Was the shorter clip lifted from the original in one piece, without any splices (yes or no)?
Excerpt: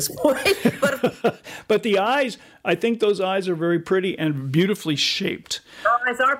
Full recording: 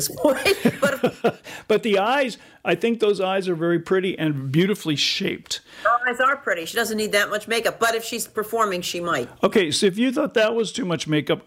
yes